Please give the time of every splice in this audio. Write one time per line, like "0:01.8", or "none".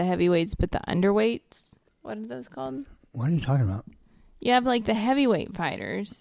none